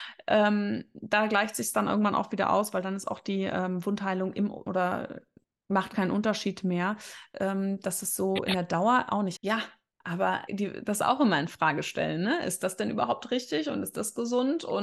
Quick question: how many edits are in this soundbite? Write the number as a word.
three